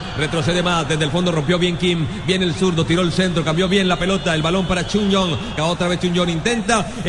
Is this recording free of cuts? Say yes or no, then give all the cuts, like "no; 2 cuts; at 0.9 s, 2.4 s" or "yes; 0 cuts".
no; 1 cut; at 5.6 s